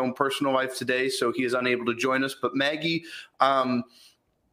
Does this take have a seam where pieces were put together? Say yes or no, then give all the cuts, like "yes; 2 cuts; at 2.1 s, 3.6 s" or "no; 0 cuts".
no; 0 cuts